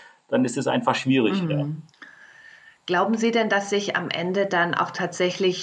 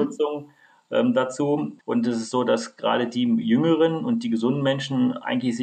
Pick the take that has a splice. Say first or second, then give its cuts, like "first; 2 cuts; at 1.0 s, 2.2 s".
second; 1 cut; at 1.8 s